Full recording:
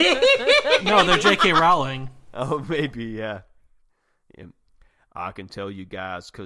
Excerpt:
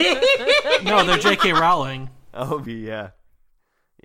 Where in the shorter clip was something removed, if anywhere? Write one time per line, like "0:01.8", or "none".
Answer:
0:02.7